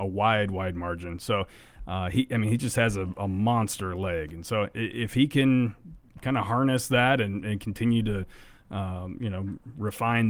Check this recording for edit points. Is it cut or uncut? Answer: uncut